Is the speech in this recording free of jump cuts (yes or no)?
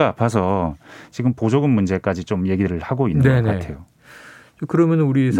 yes